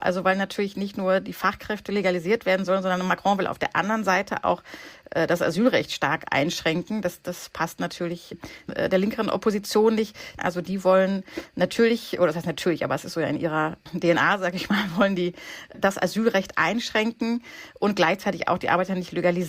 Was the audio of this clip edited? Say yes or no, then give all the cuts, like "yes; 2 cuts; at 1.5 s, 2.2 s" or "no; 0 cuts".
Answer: yes; 1 cut; at 10.4 s